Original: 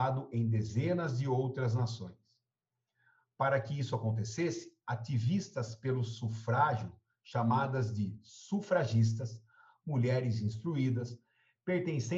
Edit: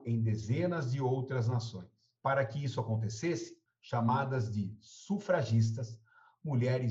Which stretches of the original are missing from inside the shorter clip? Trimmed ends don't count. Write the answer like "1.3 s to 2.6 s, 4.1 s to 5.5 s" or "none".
2.4 s to 3.3 s, 4.8 s to 7.1 s